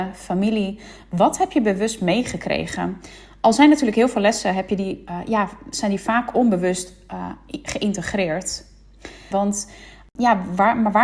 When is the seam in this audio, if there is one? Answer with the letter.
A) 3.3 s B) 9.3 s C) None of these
B